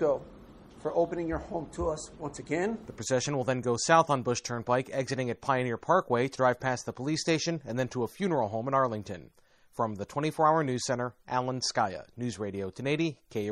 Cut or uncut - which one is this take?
uncut